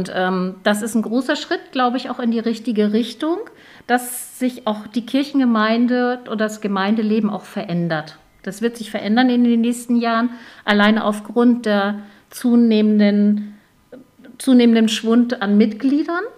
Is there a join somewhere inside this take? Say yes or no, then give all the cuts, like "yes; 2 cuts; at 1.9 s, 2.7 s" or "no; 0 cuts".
no; 0 cuts